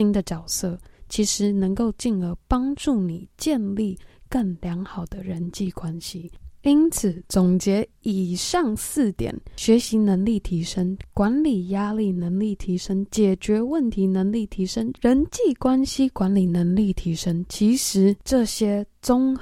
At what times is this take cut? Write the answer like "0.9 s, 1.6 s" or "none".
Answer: none